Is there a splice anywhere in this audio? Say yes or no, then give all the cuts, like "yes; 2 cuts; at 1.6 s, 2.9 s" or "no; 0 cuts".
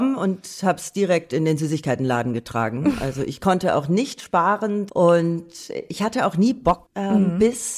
yes; 2 cuts; at 4.9 s, 6.8 s